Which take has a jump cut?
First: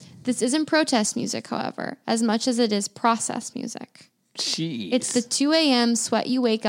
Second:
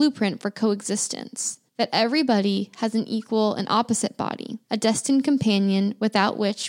second; 2 cuts; at 1.7 s, 4.6 s

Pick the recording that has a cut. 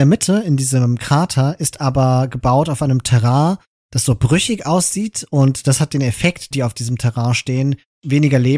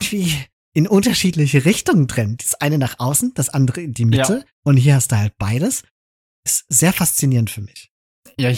first; 1 cut; at 6.5 s

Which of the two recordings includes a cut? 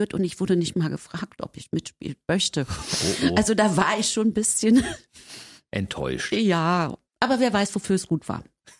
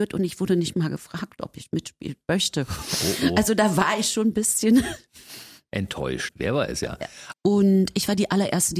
second; 2 cuts; at 6.3 s, 7.3 s

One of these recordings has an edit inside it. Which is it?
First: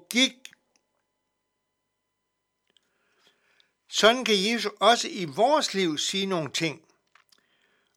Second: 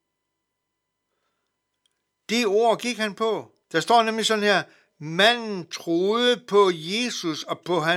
second; 1 cut; at 3.6 s

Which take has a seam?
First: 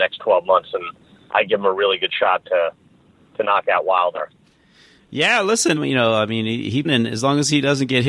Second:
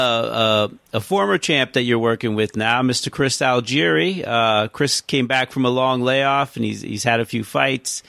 first; 2 cuts; at 5.8 s, 6.8 s

